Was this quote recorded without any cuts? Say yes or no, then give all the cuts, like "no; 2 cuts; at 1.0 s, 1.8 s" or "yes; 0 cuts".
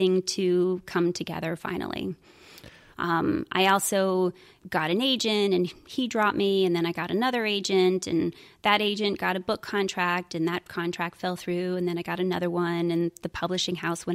no; 2 cuts; at 2.9 s, 4.6 s